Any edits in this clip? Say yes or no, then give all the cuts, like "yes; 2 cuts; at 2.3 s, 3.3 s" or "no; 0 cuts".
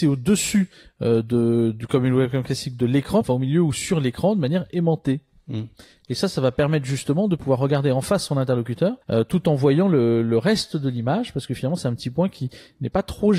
yes; 2 cuts; at 3.2 s, 9.0 s